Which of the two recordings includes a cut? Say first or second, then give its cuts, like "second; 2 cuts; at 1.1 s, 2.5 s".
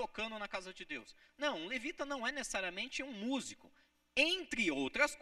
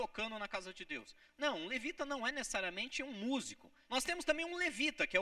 second; 1 cut; at 3.9 s